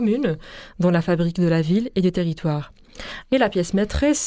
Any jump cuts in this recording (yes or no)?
yes